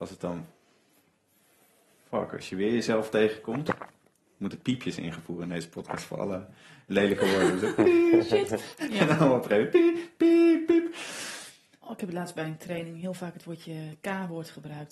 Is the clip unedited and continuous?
yes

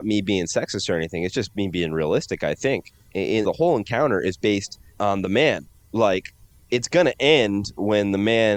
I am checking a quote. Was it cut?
yes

